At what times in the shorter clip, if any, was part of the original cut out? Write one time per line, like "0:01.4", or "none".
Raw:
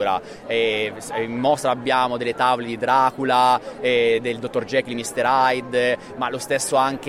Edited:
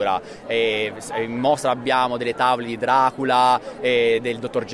none

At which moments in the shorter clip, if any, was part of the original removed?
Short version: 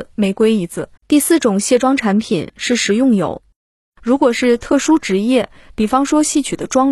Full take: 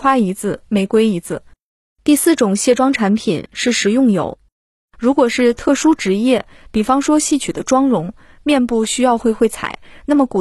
0:01.0

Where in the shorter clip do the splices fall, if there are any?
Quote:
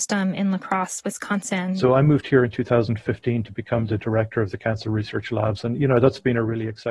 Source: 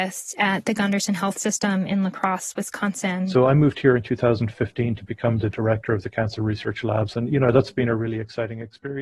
none

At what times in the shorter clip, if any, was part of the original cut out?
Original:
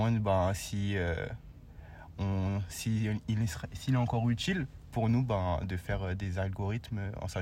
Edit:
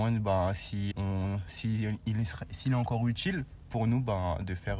0:00.9

